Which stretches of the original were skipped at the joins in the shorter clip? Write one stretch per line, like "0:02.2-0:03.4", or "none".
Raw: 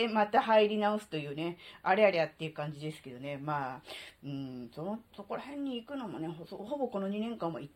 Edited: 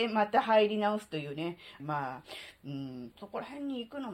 0:01.8-0:03.4
0:04.7-0:05.1